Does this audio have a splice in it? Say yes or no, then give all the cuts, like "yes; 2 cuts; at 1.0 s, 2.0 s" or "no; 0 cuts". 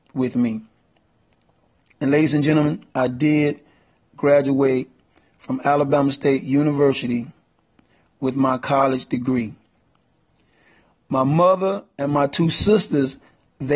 no; 0 cuts